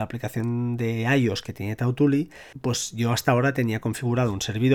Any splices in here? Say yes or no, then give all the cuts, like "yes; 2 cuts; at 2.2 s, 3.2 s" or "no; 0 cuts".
yes; 1 cut; at 2.5 s